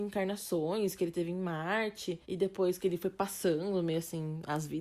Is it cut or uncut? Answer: cut